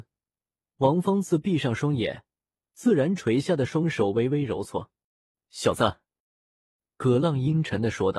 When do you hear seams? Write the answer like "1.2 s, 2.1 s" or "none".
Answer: none